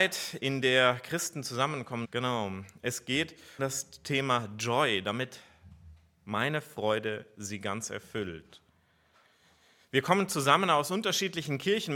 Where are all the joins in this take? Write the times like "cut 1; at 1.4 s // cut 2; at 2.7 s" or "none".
cut 1; at 2.0 s // cut 2; at 3.6 s